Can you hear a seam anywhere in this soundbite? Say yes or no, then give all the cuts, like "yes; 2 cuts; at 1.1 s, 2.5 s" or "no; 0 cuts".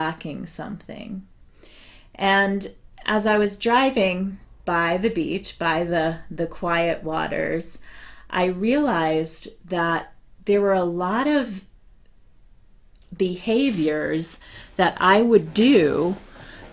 no; 0 cuts